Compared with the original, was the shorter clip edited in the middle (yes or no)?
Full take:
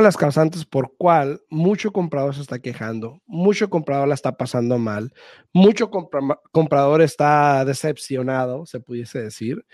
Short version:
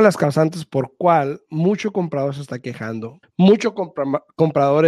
yes